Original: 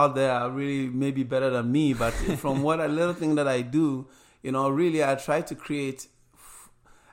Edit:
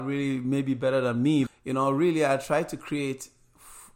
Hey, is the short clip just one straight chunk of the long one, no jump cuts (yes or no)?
no